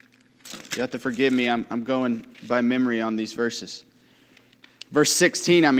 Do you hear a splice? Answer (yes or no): no